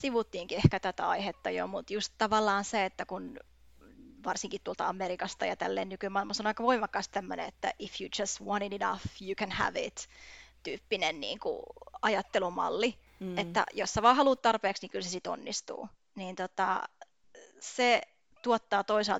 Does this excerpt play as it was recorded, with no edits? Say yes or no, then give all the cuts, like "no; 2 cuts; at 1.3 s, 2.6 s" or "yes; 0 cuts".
yes; 0 cuts